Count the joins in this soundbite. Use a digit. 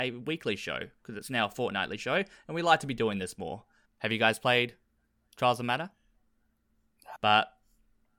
2